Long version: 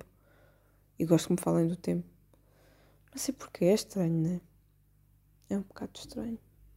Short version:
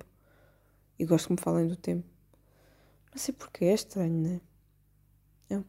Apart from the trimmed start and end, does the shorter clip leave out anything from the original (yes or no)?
no